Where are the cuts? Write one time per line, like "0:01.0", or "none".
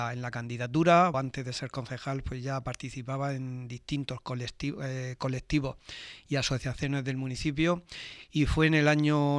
0:01.1